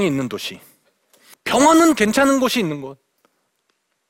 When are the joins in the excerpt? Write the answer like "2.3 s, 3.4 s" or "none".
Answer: 1.3 s